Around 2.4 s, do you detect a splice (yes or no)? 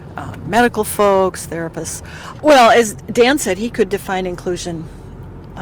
yes